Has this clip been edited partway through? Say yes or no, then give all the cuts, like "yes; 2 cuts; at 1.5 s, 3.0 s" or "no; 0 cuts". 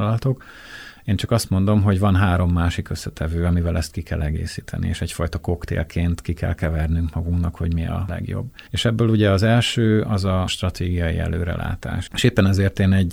yes; 1 cut; at 12.1 s